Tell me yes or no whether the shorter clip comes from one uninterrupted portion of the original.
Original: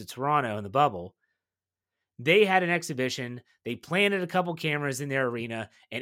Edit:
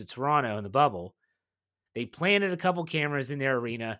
no